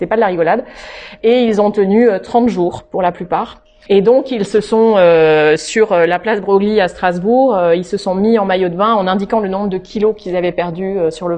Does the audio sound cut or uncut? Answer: cut